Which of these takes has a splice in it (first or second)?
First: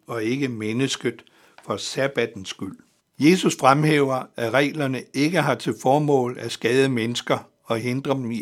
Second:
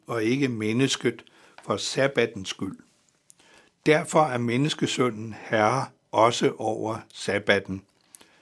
first